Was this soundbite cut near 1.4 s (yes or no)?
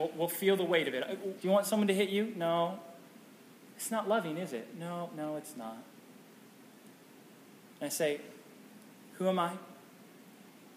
yes